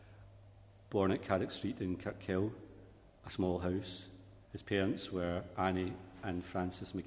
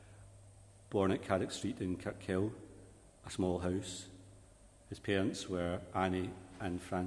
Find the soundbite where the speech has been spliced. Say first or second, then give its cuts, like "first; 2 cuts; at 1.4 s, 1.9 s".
first; 1 cut; at 4.4 s